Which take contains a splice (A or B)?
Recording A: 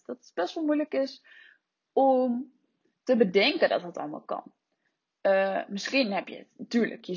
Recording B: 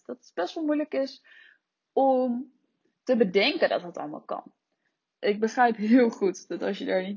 B